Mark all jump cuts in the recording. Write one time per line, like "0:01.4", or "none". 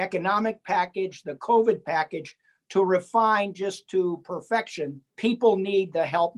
0:05.1